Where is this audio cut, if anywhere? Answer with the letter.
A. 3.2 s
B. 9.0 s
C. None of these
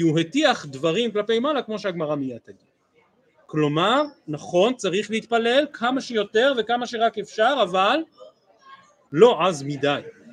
B